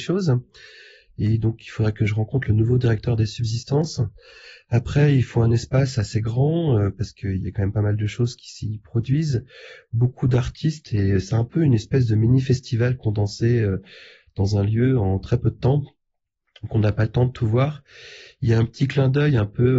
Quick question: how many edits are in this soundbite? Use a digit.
0